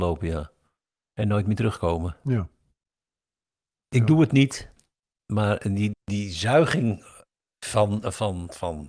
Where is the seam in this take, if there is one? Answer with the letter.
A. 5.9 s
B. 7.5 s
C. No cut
A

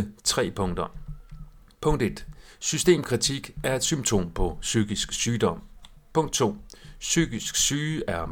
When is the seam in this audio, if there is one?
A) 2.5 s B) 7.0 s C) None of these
C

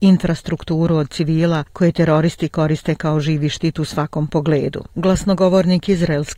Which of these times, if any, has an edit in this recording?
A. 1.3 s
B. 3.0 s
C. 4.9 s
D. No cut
C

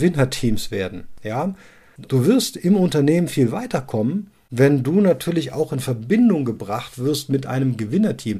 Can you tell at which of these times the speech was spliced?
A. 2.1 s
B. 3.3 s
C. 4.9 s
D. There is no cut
A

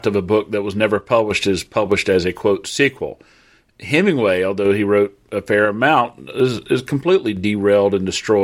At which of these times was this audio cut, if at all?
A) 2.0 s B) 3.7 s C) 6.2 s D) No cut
D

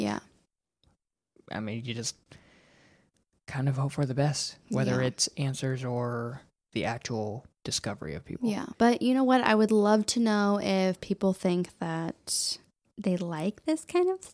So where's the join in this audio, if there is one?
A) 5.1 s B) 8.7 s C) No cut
B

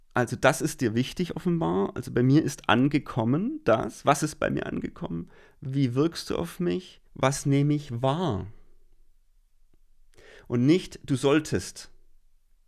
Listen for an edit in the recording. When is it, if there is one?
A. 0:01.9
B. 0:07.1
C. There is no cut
B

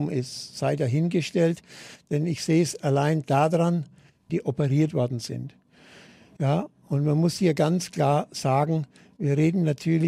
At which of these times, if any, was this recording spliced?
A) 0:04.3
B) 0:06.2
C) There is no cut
A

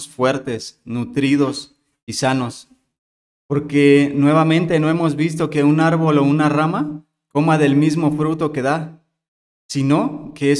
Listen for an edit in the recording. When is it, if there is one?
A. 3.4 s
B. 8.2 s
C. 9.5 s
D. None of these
A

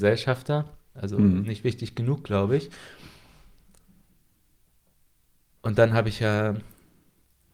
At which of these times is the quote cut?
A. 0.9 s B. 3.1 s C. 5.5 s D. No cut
A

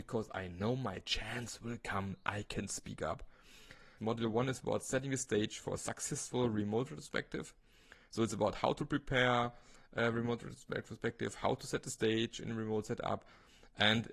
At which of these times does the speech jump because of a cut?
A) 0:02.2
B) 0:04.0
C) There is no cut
B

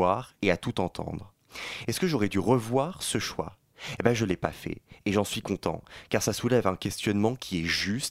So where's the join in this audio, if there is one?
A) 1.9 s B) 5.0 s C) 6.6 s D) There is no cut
A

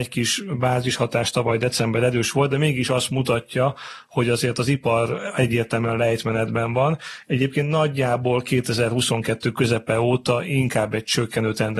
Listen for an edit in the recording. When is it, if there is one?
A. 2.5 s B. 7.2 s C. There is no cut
C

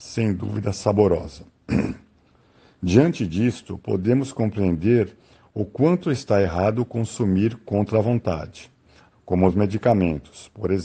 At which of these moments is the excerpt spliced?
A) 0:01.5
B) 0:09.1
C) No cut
B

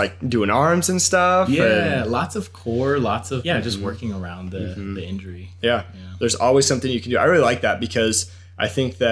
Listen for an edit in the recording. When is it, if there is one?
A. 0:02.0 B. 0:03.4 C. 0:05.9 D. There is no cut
B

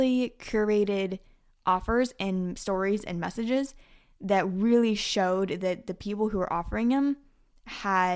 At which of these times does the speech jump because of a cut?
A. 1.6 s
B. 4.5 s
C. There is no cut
C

